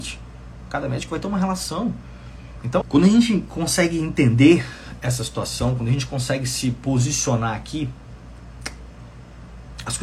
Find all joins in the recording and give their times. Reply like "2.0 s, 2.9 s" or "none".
2.8 s